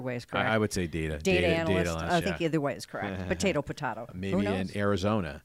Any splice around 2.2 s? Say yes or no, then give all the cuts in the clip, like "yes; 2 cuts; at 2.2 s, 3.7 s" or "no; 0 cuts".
yes; 2 cuts; at 2.2 s, 4.1 s